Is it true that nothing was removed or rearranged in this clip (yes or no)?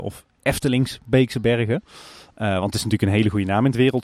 yes